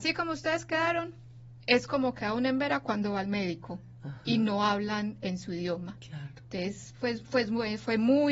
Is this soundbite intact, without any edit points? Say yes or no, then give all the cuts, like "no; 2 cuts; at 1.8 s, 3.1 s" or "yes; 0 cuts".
yes; 0 cuts